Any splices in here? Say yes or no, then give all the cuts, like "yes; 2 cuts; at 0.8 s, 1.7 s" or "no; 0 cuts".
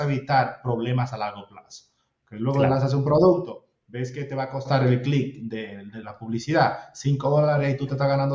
no; 0 cuts